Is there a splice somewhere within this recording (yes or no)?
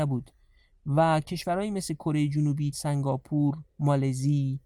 yes